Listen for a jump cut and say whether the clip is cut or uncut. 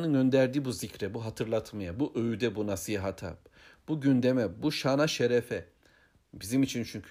uncut